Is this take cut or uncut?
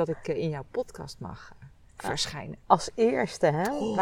uncut